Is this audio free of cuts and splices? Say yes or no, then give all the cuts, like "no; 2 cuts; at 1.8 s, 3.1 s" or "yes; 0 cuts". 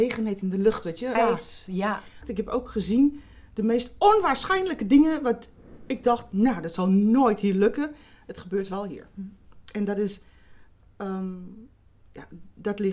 no; 2 cuts; at 1.1 s, 2.2 s